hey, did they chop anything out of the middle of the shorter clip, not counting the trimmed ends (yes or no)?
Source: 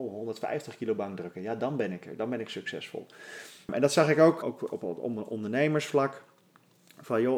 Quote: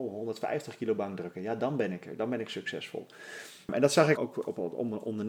yes